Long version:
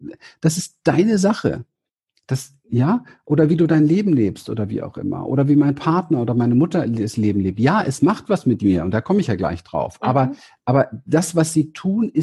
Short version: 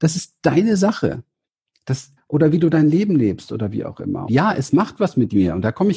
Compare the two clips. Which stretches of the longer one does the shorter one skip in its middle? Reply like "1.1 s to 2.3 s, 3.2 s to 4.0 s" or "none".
2.6 s to 3.1 s, 5.2 s to 7.5 s